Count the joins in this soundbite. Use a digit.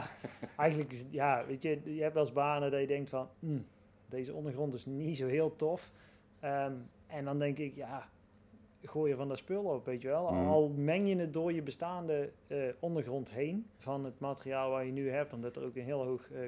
1